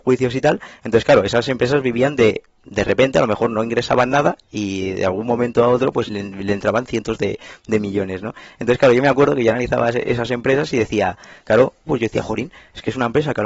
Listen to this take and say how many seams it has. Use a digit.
2